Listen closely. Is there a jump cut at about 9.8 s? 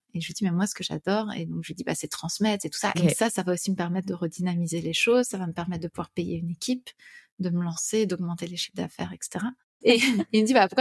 yes; 2 cuts; at 2.9 s, 9.8 s

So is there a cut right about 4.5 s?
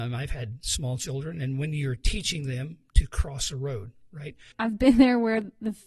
yes; 1 cut; at 4.5 s

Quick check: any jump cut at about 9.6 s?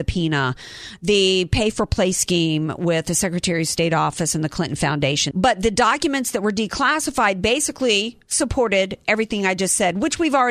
no; 1 cut; at 5.3 s

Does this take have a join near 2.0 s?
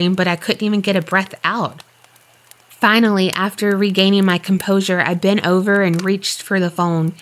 no; 0 cuts

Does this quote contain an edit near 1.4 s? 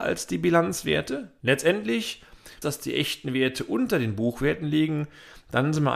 yes; 2 cuts; at 1.4 s, 2.6 s

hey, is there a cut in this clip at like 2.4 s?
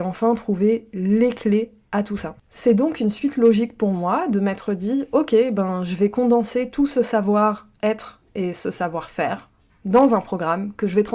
yes; 1 cut; at 2.4 s

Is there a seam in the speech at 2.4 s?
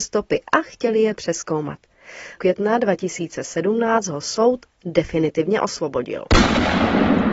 yes; 1 cut; at 2.4 s

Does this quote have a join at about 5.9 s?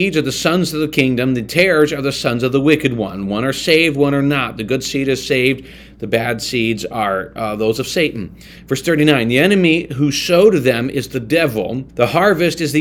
no; 1 cut; at 11.9 s

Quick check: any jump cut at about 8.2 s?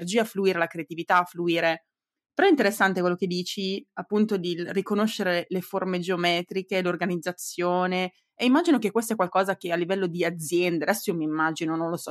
no; 0 cuts

